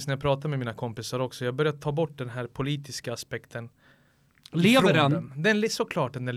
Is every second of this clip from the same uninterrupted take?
yes; 0 cuts

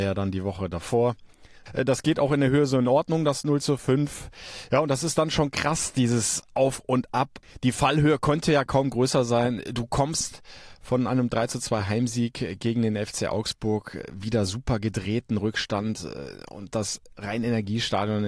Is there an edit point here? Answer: yes; 1 cut; at 1.7 s

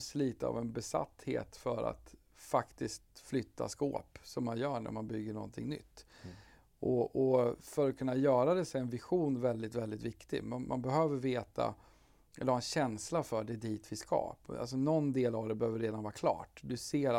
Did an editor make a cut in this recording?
no; 0 cuts

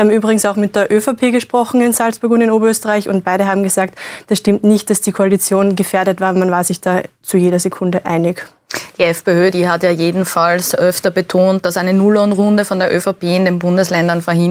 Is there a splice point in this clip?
no; 0 cuts

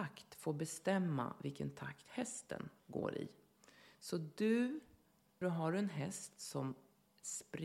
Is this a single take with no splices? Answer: no; 1 cut; at 5.4 s

